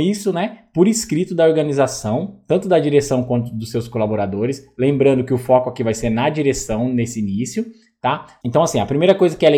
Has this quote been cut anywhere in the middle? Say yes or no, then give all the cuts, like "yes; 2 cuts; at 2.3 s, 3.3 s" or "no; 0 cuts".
yes; 1 cut; at 8.4 s